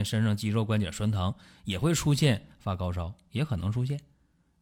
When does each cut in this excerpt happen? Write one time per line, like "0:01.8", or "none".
none